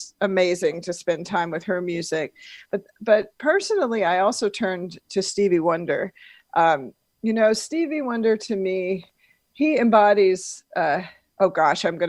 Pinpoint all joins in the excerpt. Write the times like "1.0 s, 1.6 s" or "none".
none